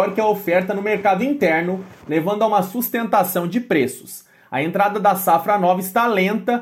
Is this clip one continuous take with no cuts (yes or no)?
yes